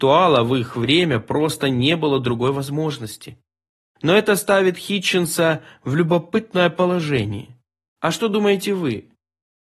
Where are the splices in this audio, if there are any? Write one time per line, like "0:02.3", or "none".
0:07.9